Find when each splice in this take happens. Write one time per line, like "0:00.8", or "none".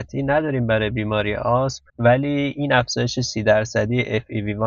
0:01.9